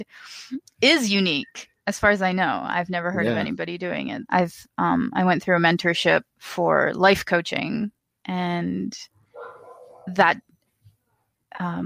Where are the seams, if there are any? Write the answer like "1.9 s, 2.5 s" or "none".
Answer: 4.3 s, 6.3 s

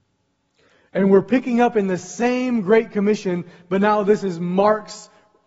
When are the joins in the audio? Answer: none

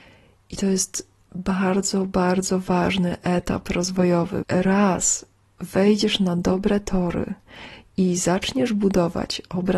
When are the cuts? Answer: 4.4 s

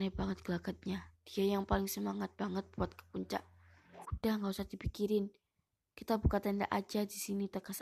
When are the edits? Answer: 4.0 s

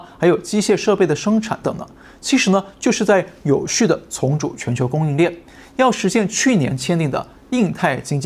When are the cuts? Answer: 1.6 s

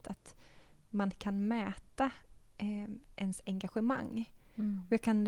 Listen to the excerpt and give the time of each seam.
none

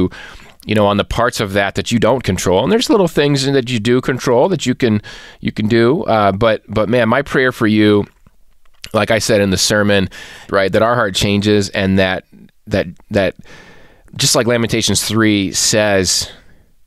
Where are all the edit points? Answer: 10.5 s

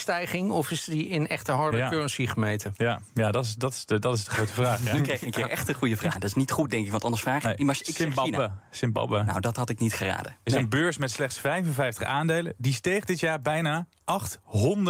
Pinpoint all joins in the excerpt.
6.1 s

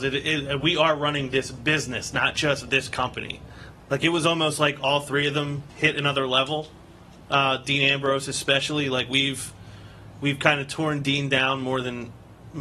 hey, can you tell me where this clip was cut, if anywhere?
3.7 s

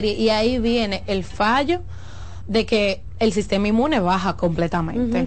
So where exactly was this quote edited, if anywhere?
2.4 s

